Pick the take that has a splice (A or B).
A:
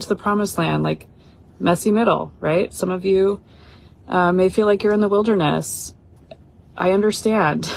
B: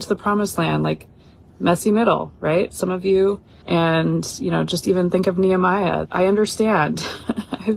B